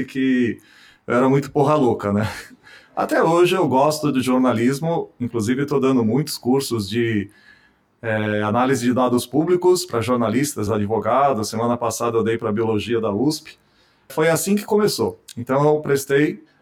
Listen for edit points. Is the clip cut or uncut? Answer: cut